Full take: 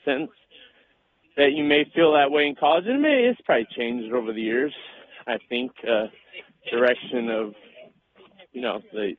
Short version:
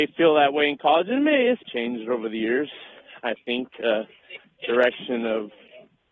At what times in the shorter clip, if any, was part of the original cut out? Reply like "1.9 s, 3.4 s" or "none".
1.6 s